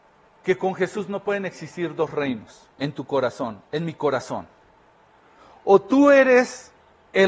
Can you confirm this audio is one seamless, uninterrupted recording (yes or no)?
no